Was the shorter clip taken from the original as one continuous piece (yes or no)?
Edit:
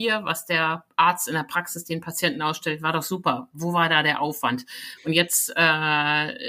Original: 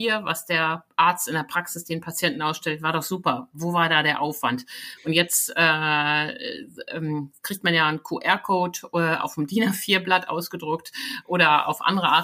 yes